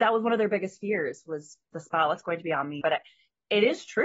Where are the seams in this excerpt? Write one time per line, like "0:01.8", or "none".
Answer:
0:01.7
0:02.8